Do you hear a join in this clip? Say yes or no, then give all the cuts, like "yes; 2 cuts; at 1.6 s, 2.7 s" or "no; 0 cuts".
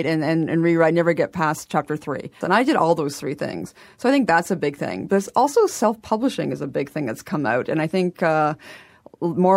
yes; 1 cut; at 2.4 s